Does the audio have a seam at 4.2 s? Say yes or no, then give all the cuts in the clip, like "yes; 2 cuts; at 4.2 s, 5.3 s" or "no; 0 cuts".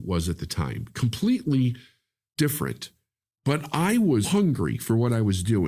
yes; 1 cut; at 4.2 s